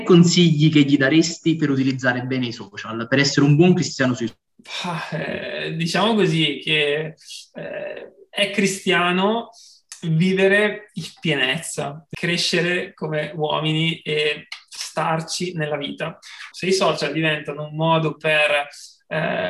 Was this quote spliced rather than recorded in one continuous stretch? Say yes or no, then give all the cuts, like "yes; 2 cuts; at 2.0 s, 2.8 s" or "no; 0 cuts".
yes; 1 cut; at 16.5 s